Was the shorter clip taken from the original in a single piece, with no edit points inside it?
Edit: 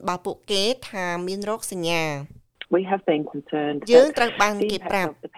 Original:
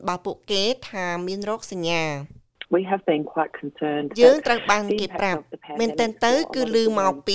no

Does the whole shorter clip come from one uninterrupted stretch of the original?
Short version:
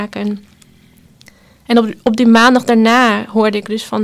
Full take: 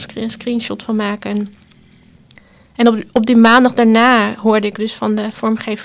yes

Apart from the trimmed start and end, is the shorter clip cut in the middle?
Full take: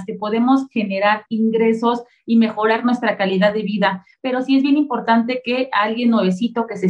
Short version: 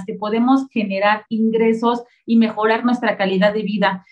no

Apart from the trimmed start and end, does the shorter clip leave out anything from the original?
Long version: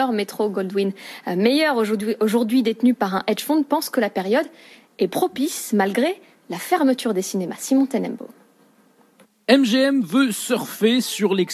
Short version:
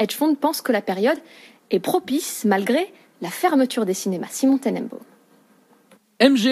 no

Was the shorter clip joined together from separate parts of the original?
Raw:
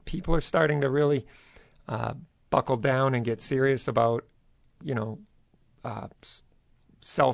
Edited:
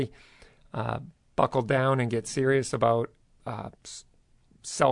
yes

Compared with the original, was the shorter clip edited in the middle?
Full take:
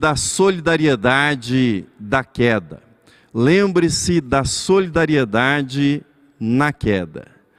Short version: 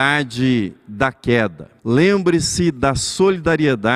yes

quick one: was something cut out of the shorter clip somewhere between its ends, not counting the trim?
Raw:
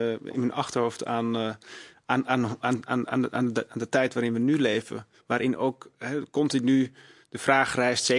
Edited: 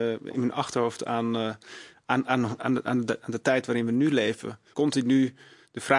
yes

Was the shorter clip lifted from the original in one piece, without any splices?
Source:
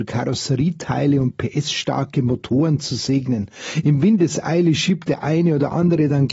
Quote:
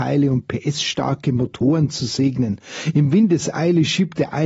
yes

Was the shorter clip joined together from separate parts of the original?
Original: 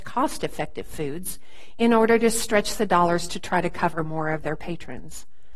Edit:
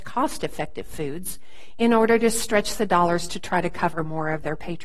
no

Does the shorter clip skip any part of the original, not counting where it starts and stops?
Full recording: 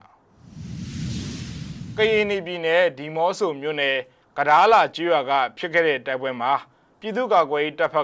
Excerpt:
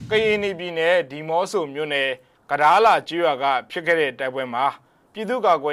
no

